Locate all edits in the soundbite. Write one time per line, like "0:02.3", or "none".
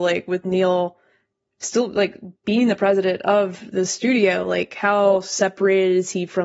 none

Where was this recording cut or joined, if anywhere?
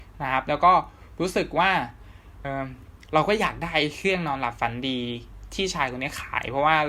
0:02.4

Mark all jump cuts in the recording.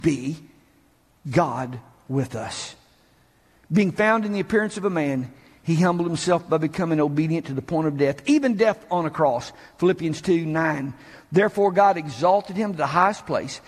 none

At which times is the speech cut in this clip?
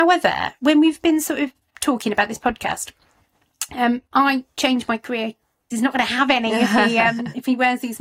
0:05.7

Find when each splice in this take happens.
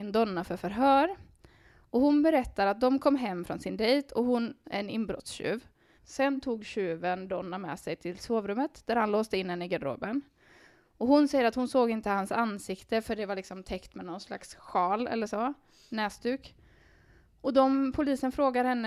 0:04.6
0:06.0

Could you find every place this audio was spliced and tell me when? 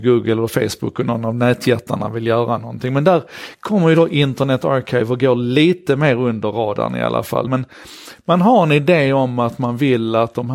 0:07.5

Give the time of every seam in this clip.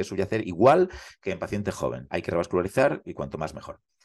none

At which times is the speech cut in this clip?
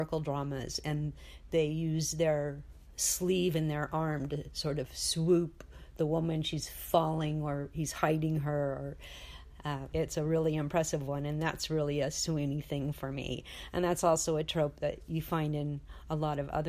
0:09.9

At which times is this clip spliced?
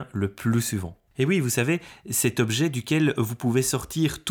0:01.1

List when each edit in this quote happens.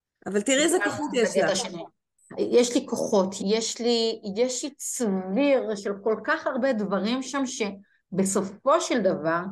0:03.4
0:05.8

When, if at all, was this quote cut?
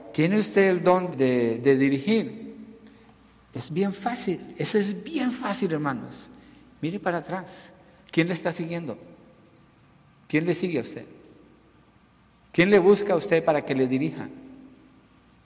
0:01.1

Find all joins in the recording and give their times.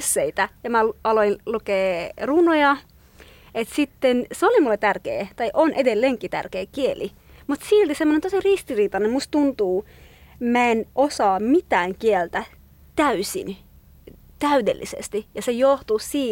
none

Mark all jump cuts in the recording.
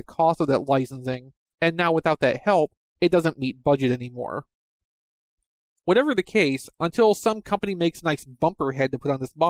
none

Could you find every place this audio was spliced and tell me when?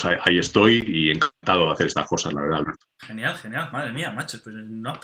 0:03.0

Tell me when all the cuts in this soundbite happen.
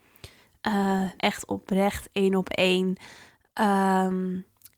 0:01.2
0:03.4

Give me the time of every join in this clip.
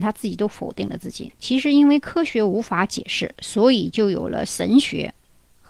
0:01.3

